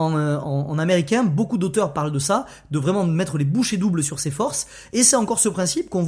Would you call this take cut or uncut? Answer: uncut